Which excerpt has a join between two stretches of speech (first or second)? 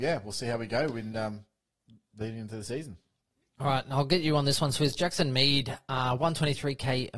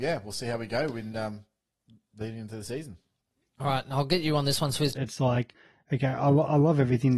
second